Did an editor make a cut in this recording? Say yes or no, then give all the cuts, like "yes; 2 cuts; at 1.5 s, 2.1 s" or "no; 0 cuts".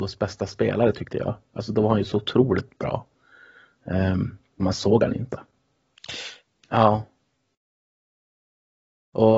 yes; 2 cuts; at 4.6 s, 6.5 s